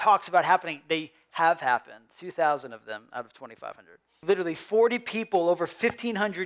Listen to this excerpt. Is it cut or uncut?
cut